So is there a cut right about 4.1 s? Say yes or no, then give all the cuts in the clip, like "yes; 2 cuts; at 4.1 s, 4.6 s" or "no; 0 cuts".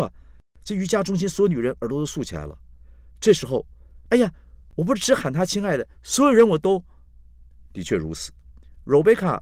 yes; 1 cut; at 4.1 s